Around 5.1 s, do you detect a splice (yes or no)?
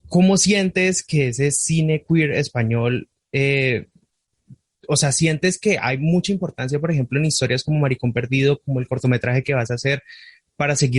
no